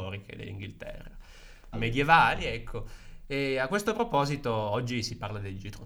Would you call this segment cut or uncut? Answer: cut